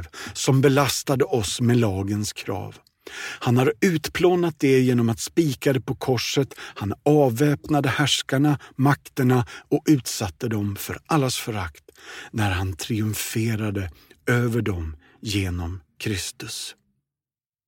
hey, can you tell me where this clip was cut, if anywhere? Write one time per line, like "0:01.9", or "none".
none

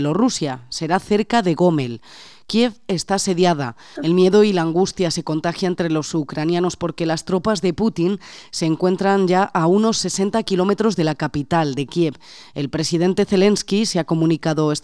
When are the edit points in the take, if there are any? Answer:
0:04.0

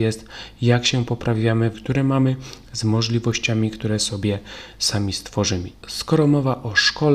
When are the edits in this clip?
0:01.7
0:05.7

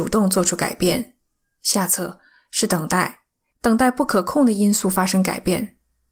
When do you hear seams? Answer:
0:03.5

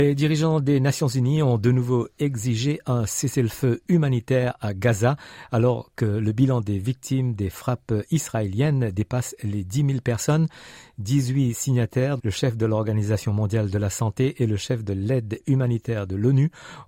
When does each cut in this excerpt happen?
0:12.2

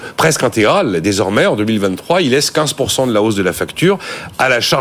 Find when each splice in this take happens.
none

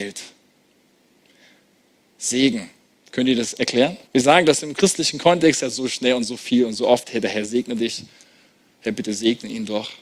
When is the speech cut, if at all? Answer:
0:02.9
0:04.1

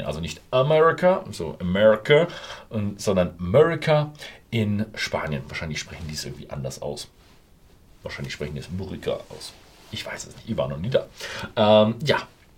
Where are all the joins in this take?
none

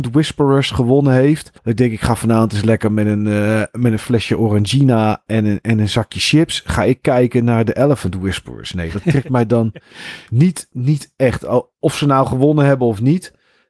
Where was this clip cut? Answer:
0:01.6

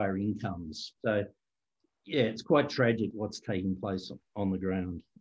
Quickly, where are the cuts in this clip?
0:01.0
0:03.1

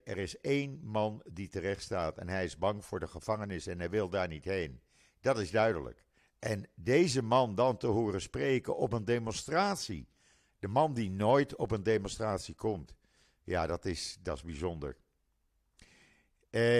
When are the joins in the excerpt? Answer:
0:06.2

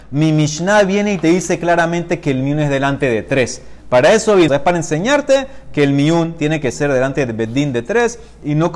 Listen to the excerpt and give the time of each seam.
0:04.5

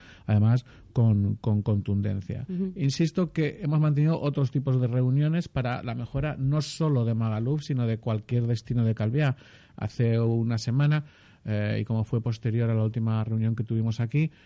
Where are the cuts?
none

